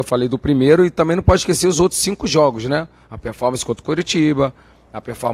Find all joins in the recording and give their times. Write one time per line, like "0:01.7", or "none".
none